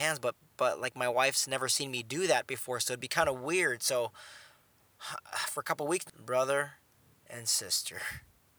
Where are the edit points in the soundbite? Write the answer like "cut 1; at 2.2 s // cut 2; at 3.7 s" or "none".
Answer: cut 1; at 6.1 s